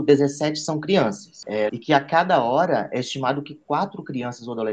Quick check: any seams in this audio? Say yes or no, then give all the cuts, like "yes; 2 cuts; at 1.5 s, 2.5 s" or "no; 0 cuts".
yes; 1 cut; at 1.7 s